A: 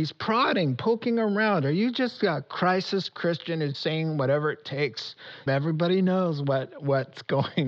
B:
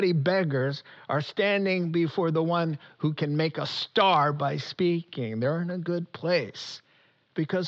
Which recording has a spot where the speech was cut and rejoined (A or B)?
A